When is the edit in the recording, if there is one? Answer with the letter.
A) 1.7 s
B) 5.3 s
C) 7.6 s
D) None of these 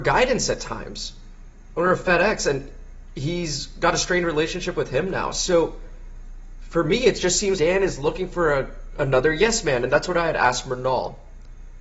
C